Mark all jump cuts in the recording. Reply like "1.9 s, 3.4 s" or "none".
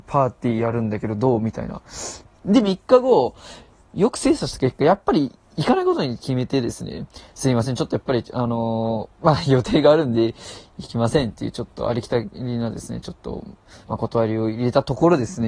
2.4 s